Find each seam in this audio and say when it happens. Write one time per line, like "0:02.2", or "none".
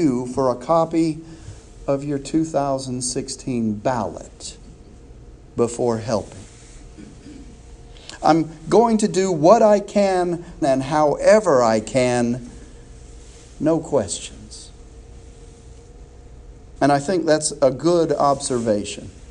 0:10.6
0:16.8